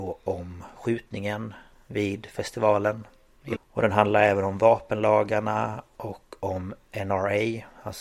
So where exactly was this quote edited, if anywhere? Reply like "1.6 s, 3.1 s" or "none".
3.5 s